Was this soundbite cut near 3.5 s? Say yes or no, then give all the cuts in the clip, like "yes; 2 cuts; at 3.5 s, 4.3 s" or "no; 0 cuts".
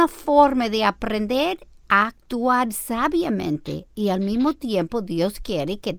no; 0 cuts